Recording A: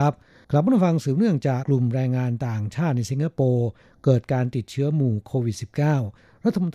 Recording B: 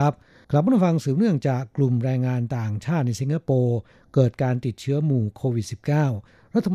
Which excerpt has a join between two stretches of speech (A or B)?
A